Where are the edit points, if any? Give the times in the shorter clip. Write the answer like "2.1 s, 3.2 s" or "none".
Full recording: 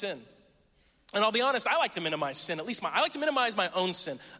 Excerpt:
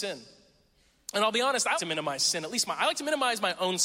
1.7 s